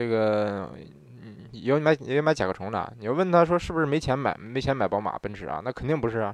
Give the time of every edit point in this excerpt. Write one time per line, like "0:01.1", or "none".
none